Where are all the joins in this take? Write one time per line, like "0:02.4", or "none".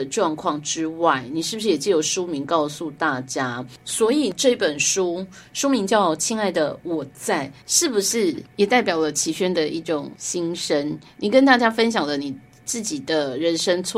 0:03.8